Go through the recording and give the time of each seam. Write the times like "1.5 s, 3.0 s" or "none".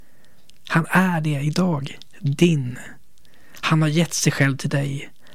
none